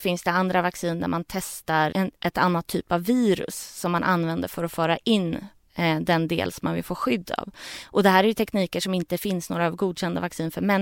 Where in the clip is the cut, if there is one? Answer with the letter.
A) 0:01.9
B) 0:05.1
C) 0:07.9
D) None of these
A